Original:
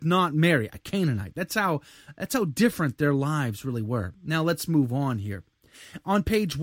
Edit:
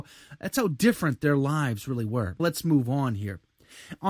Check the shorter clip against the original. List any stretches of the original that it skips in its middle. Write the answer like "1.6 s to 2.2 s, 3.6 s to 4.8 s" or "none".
4.2 s to 4.4 s